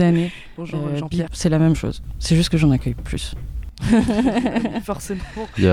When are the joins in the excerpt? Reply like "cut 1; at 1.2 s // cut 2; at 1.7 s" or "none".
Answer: cut 1; at 1.3 s